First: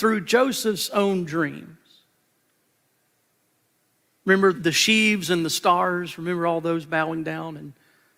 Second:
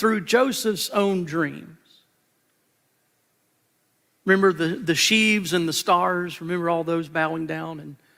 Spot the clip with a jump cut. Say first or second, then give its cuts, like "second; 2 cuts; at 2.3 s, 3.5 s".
first; 1 cut; at 4.5 s